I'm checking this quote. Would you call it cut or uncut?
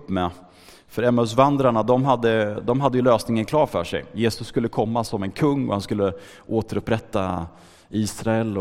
uncut